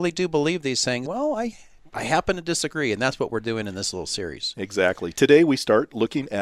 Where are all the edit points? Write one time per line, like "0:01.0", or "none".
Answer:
0:01.0